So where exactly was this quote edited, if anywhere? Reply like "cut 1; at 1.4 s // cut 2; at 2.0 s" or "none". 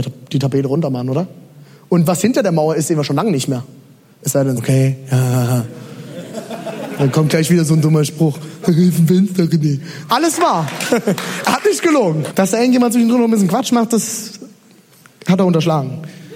cut 1; at 4.6 s // cut 2; at 10.1 s // cut 3; at 12.3 s